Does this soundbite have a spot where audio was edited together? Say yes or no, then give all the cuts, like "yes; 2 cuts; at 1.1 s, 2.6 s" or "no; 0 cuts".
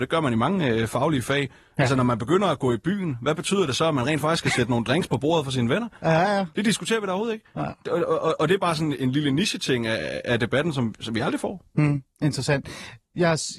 yes; 1 cut; at 7.9 s